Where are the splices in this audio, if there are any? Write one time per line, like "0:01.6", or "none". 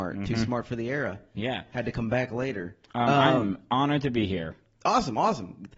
none

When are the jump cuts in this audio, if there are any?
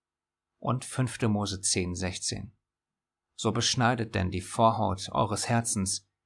none

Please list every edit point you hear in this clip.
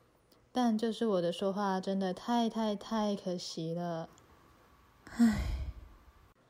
none

